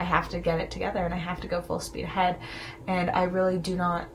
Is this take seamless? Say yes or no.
yes